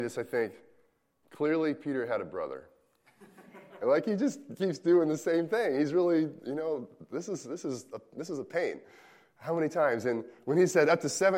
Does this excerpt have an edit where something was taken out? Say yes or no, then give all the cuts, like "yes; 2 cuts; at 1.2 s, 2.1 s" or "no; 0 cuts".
yes; 1 cut; at 3.8 s